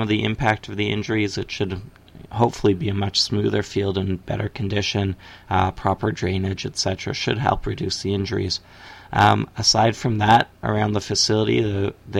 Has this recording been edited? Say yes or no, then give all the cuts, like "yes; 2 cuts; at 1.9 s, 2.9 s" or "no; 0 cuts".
no; 0 cuts